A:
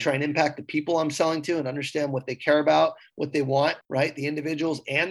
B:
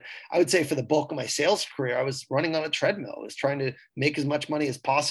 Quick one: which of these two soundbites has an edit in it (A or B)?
A